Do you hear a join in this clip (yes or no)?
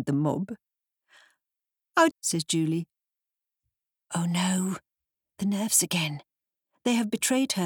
yes